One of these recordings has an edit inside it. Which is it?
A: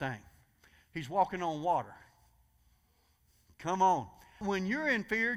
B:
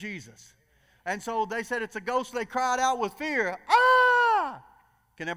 A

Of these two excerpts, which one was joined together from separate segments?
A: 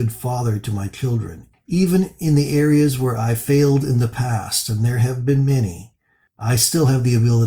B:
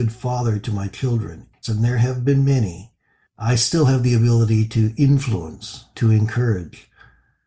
B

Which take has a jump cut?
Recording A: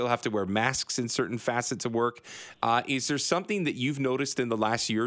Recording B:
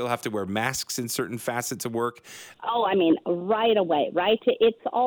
B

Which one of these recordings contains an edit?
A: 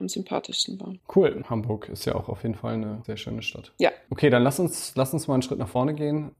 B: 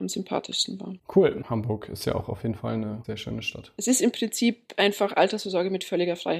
B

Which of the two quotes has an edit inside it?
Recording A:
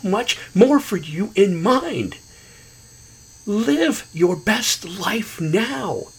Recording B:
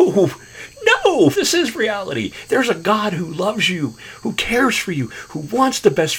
B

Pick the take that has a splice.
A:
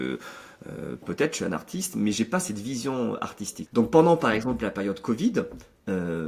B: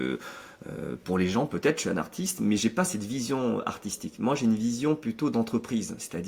A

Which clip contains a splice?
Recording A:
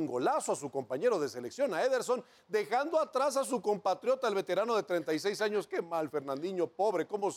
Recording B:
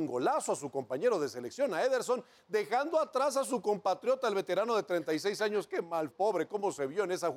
B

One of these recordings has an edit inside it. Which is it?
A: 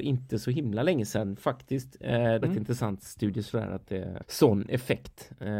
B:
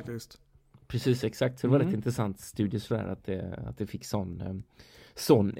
A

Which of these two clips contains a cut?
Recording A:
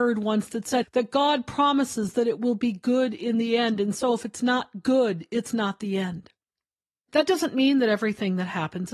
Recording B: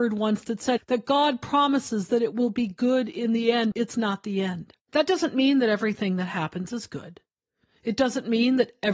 B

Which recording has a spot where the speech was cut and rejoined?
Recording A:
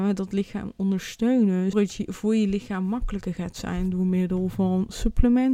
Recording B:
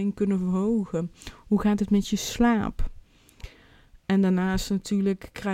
A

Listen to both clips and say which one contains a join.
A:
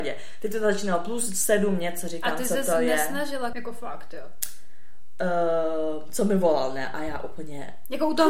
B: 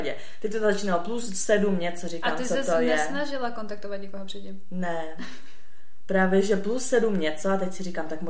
A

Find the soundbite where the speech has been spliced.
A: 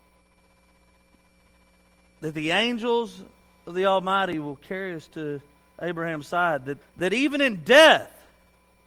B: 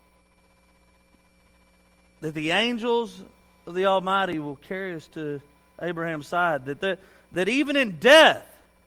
A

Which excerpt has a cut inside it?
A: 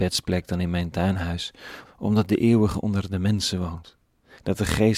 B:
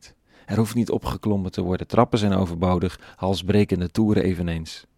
A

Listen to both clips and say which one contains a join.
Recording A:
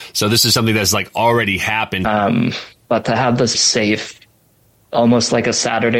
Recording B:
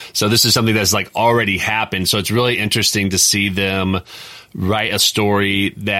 A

